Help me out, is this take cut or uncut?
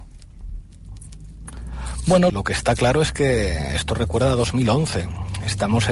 cut